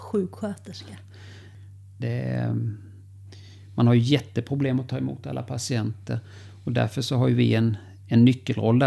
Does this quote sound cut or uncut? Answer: cut